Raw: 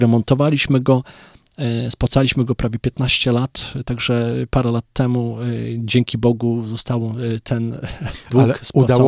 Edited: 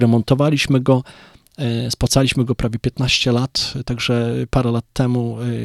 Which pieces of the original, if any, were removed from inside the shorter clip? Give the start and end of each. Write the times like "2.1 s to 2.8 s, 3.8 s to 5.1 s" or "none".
none